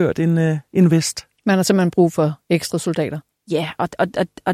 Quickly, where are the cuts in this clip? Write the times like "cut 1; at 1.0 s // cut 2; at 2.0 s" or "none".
cut 1; at 1.4 s // cut 2; at 3.3 s